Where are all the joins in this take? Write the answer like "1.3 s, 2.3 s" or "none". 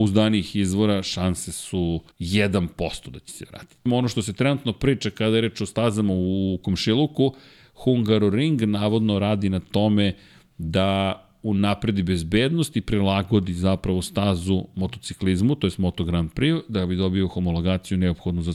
2.1 s, 3.9 s

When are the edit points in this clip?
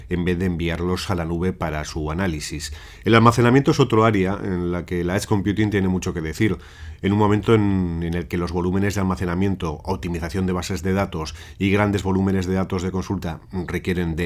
none

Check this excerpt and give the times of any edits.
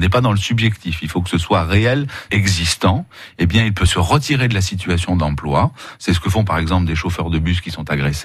2.3 s

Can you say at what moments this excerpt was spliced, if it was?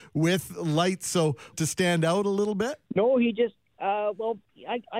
1.5 s, 2.9 s

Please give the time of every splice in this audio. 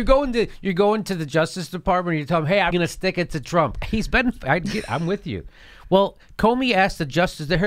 2.7 s, 3.8 s

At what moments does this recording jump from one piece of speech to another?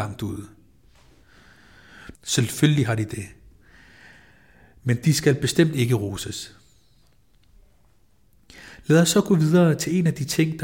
2.1 s

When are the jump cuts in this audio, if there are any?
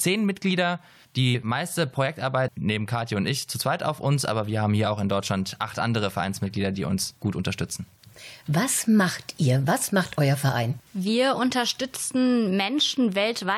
2.5 s, 10.9 s

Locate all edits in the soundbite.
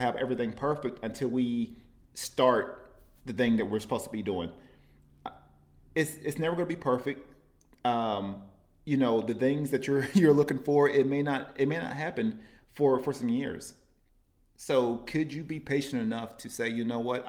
none

